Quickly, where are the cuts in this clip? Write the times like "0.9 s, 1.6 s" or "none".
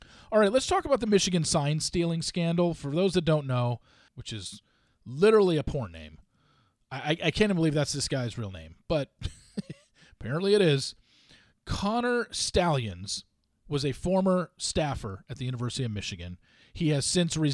4.1 s